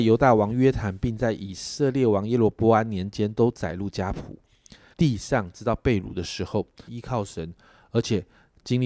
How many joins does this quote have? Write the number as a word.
two